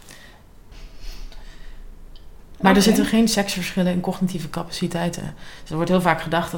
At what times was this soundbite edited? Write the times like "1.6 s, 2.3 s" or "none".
none